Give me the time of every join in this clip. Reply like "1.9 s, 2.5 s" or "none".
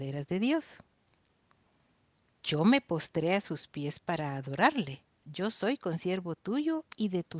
5.2 s

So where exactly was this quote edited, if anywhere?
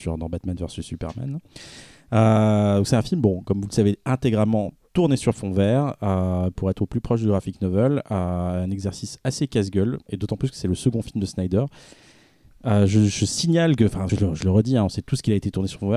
10.1 s, 14.1 s

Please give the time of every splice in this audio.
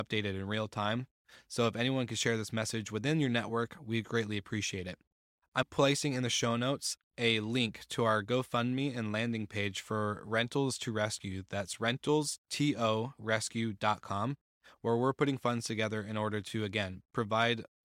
5.6 s

